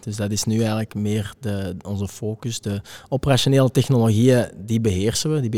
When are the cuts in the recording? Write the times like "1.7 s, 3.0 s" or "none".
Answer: none